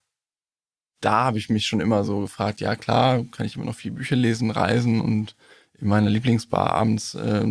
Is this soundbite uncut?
yes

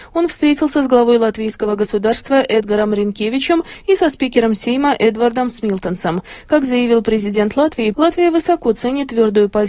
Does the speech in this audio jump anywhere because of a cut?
yes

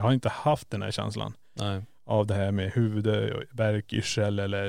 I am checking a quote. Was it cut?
no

